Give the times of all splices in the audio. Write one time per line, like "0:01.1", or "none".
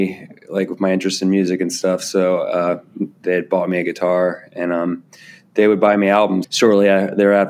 0:06.4

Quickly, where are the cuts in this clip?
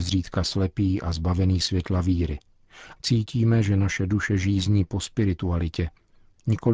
0:03.0

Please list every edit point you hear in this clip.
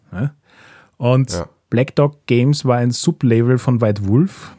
0:01.7

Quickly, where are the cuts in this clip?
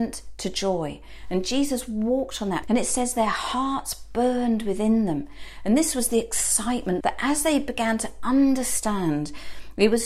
0:02.6
0:07.0

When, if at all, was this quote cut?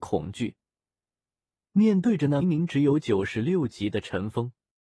0:02.4

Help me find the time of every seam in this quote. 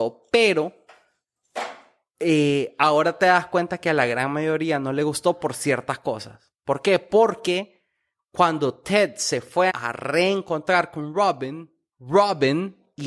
0:09.7

